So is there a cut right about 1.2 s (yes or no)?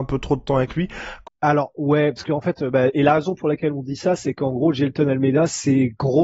yes